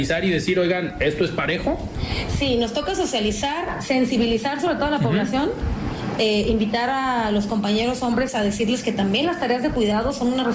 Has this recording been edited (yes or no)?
no